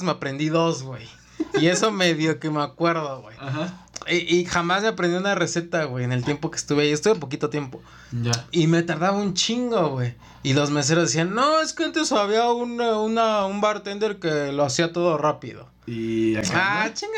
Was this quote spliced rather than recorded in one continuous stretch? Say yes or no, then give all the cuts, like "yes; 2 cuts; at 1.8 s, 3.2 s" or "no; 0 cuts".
no; 0 cuts